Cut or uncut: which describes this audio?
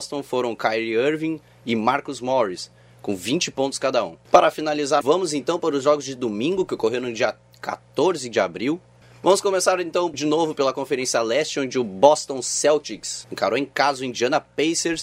cut